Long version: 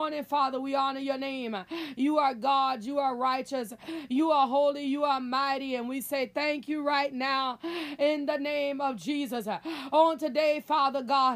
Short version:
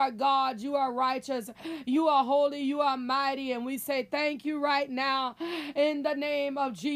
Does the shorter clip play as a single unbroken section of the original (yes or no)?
yes